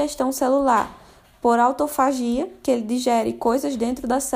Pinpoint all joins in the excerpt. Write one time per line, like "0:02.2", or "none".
none